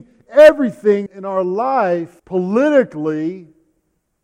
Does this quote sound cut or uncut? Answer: cut